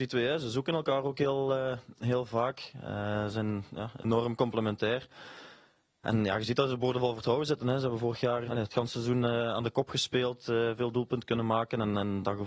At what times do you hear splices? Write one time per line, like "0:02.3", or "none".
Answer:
0:08.4